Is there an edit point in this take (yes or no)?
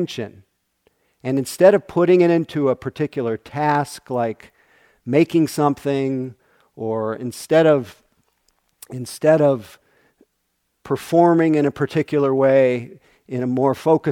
no